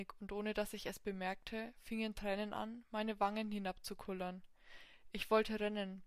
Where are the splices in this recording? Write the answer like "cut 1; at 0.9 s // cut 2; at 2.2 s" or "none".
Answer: none

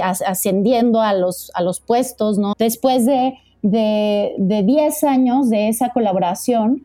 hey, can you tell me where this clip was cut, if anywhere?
cut 1; at 2.5 s

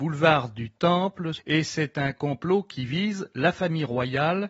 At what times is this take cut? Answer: cut 1; at 1.4 s

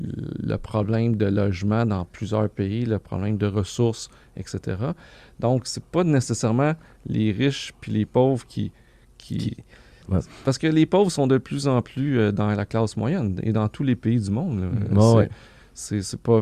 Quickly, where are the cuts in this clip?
cut 1; at 10.0 s

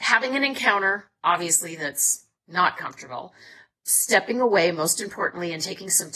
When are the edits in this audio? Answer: none

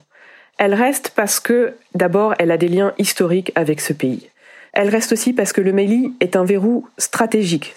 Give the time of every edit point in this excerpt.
cut 1; at 4.7 s

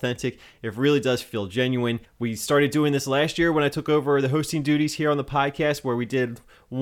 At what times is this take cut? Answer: cut 1; at 2.0 s

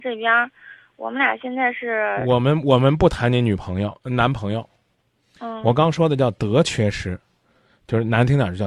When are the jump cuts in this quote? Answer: none

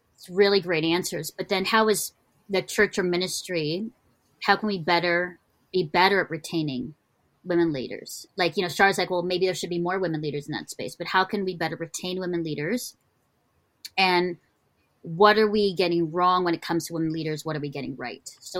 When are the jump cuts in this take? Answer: none

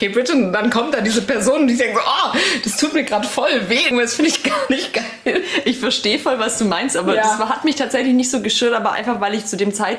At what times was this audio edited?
cut 1; at 3.9 s

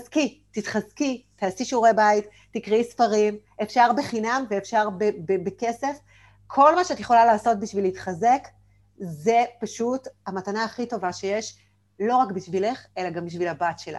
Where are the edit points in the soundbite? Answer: none

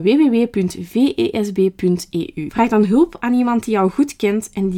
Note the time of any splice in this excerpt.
cut 1; at 2.5 s

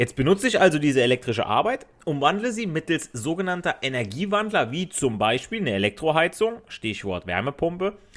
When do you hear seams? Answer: none

